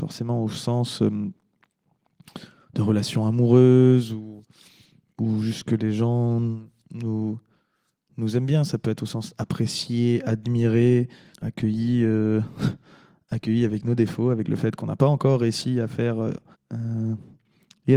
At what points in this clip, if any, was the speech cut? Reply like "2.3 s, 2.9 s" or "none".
11.3 s, 16.5 s